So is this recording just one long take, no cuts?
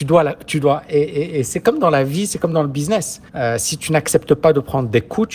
no; 1 cut; at 3.3 s

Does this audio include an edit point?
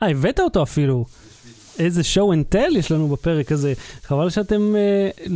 no; 0 cuts

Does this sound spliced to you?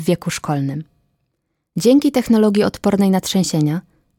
no; 0 cuts

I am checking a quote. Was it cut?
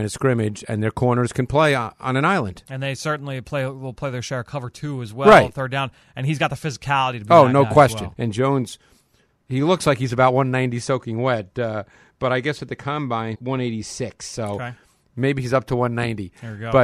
yes; 2 cuts; at 8.1 s, 13.3 s

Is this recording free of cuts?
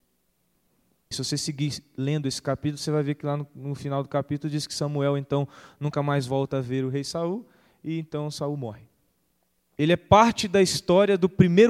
no; 2 cuts; at 1.1 s, 9.7 s

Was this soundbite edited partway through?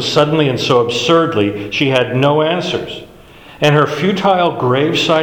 no; 0 cuts

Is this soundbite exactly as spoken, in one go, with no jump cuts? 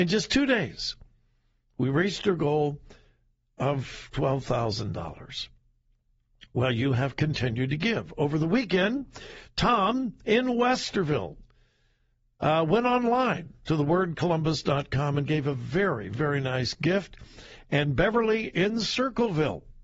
yes; 0 cuts

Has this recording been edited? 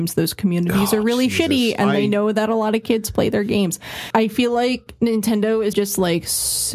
yes; 2 cuts; at 4.1 s, 5.7 s

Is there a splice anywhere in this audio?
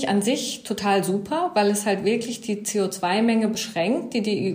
no; 0 cuts

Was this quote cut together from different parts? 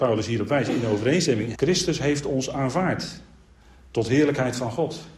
yes; 1 cut; at 1.5 s

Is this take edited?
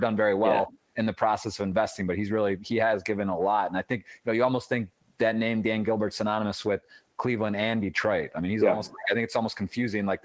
no; 0 cuts

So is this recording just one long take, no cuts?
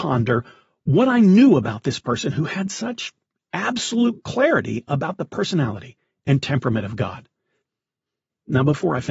yes; 0 cuts

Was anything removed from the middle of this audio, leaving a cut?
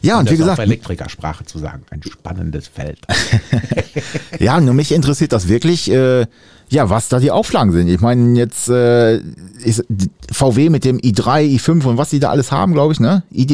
no; 0 cuts

